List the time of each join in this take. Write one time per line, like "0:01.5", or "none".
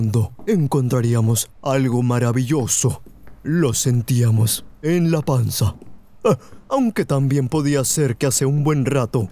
none